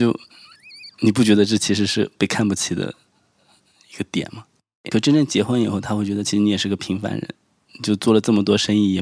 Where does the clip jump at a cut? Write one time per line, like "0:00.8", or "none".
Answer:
0:04.9